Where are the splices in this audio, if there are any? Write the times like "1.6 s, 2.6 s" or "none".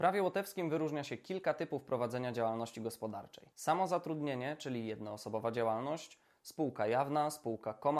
3.5 s